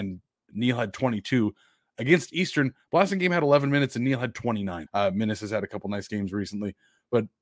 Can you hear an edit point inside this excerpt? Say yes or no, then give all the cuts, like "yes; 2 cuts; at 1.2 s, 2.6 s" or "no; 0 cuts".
yes; 1 cut; at 4.9 s